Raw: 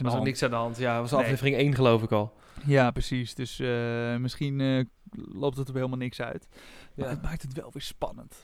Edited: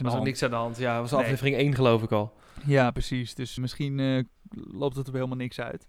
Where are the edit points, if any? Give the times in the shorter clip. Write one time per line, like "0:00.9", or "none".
0:03.6